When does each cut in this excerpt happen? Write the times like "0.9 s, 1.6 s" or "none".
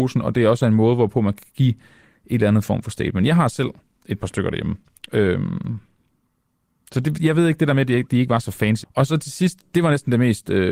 8.8 s